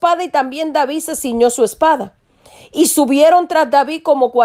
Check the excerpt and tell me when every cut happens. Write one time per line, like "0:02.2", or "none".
none